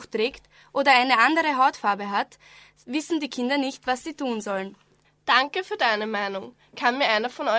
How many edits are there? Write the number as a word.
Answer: one